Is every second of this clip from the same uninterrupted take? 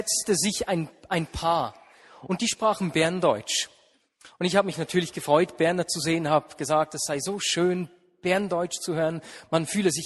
yes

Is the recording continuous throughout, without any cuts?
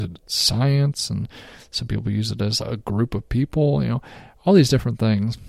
no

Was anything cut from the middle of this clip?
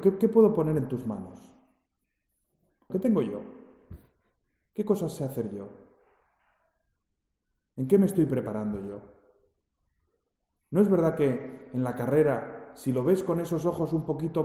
yes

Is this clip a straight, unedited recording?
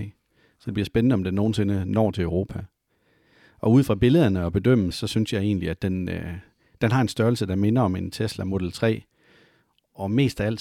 yes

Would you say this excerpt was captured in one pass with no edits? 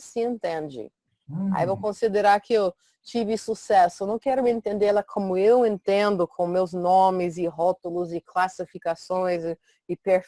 yes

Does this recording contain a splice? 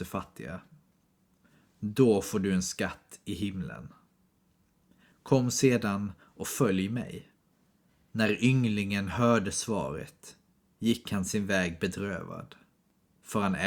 no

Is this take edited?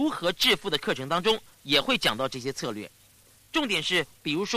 no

